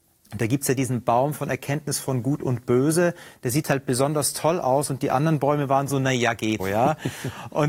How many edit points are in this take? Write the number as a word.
one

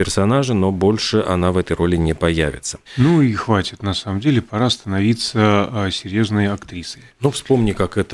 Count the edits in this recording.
one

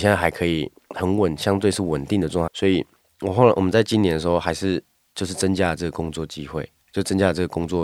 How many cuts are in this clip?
one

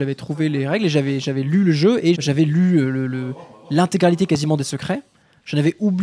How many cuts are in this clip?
one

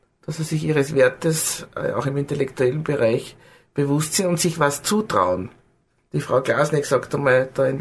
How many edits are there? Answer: zero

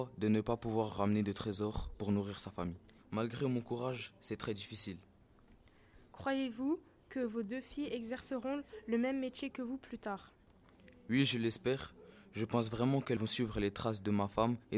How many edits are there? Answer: one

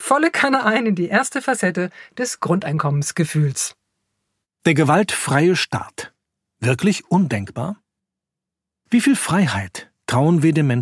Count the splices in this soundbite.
zero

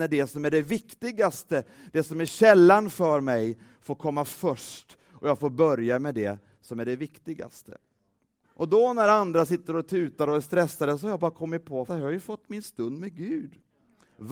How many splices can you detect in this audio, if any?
two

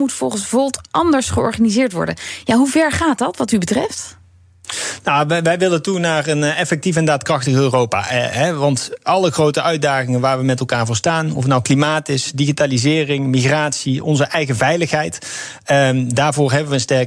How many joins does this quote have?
zero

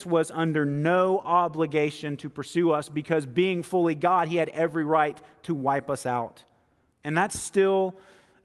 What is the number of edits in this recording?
one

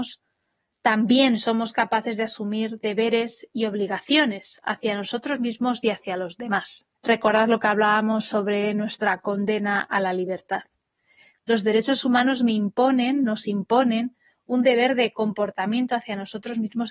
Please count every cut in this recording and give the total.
two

